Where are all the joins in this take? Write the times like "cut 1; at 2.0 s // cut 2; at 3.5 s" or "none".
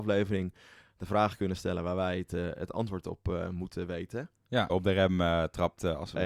cut 1; at 4.7 s